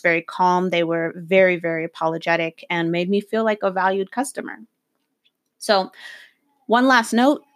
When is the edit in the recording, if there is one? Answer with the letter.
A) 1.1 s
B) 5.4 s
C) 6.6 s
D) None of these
D